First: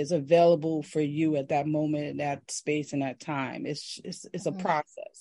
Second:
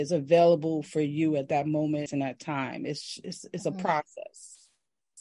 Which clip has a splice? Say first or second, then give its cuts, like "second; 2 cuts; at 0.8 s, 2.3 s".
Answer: second; 1 cut; at 2.1 s